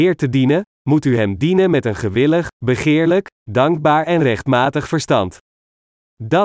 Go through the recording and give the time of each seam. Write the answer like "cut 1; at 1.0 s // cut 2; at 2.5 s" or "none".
none